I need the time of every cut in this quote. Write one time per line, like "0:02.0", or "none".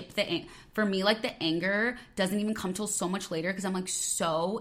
none